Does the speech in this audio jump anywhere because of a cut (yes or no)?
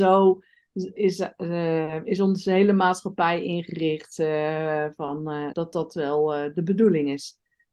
yes